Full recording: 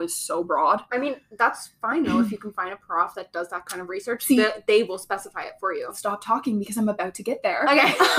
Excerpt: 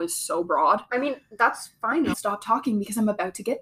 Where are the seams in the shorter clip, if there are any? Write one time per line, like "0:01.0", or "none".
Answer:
0:02.1